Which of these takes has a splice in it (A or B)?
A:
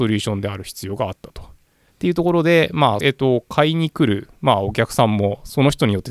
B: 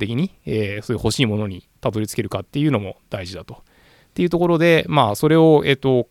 A